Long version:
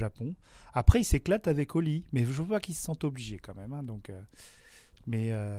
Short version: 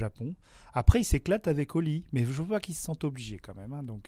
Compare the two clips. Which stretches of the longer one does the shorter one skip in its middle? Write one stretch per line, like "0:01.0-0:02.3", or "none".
none